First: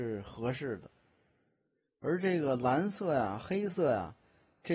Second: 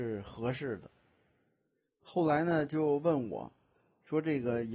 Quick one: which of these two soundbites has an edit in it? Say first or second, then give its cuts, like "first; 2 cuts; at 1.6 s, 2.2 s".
second; 1 cut; at 2.0 s